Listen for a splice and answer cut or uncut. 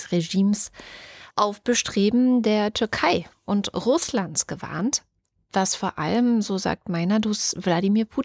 cut